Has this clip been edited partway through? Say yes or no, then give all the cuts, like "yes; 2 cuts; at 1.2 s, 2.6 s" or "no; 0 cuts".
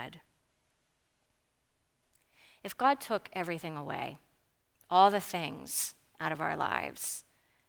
no; 0 cuts